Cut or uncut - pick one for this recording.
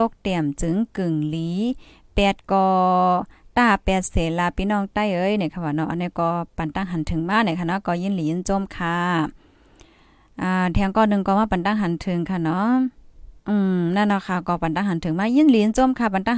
cut